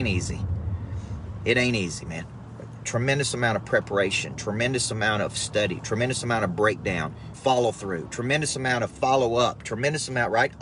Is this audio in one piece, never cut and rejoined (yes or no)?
no